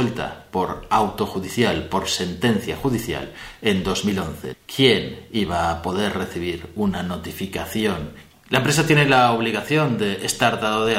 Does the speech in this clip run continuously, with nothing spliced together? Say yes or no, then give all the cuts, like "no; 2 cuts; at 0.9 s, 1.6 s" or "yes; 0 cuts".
no; 2 cuts; at 4.5 s, 8.3 s